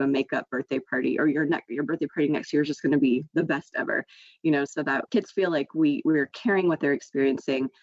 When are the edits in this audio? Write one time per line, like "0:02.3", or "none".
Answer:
0:05.1